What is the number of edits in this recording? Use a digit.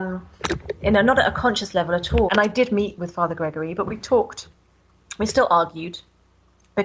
1